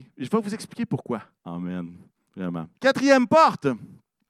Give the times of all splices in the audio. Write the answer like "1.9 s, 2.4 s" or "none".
1.4 s, 2.7 s